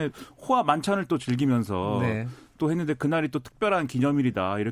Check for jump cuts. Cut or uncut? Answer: uncut